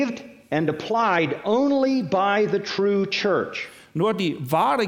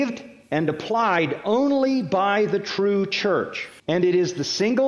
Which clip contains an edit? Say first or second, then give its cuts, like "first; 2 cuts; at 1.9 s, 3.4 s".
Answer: second; 1 cut; at 3.8 s